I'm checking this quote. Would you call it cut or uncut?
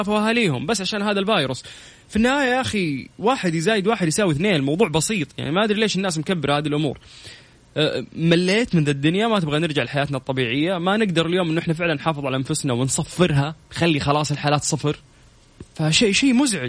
uncut